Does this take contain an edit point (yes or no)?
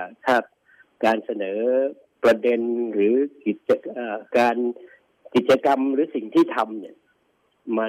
yes